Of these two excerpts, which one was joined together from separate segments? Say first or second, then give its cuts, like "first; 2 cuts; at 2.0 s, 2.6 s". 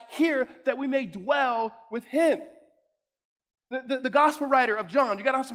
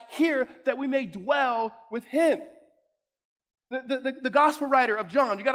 first; 1 cut; at 4.0 s